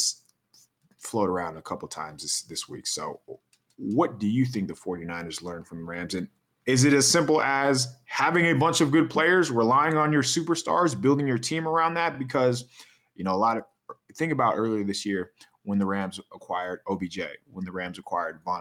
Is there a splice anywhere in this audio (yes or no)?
no